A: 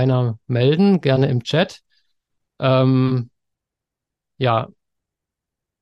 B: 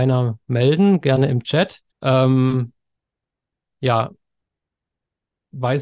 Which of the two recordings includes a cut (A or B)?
B